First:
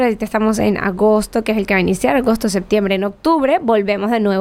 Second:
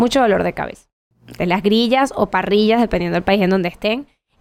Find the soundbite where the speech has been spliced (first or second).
second